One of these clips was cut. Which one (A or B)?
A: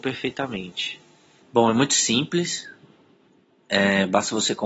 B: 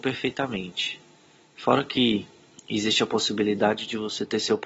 A